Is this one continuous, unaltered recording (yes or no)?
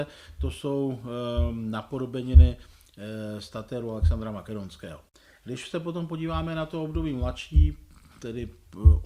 yes